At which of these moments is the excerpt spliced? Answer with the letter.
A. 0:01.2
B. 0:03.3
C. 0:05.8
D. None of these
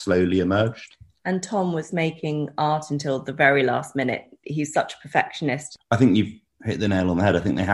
C